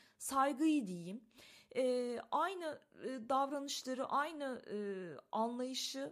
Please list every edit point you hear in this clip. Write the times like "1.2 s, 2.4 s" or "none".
none